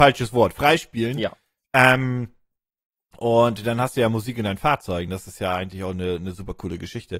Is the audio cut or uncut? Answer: uncut